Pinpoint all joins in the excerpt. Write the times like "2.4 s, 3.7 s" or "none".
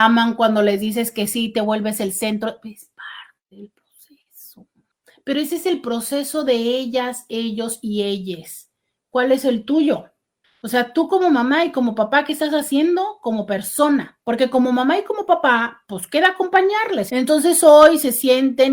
14.2 s, 17.1 s